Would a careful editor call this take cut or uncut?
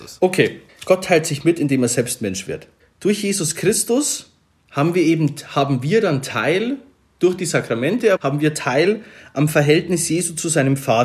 cut